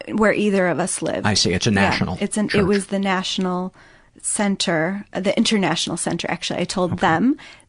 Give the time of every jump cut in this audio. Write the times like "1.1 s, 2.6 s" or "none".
none